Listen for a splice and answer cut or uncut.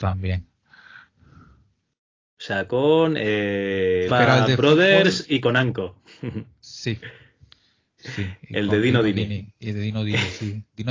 cut